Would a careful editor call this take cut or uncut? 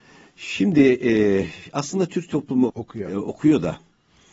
cut